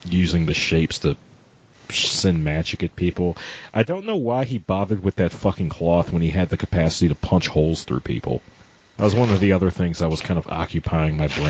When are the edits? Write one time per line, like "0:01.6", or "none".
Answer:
0:08.9

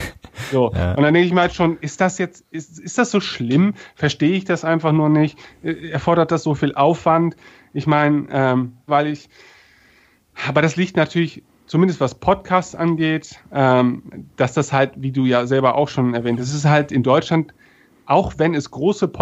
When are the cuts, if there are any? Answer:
0:08.9

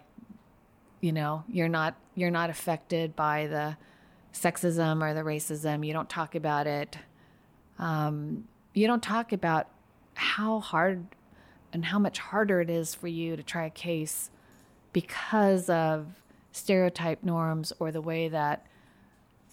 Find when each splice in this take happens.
0:07.6

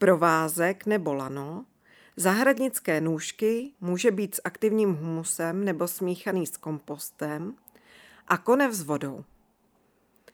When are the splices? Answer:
0:03.7

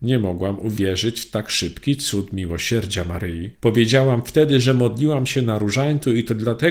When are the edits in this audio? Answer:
0:03.5

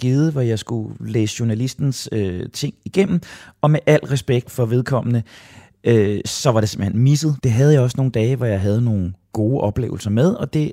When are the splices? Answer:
0:04.4
0:07.4

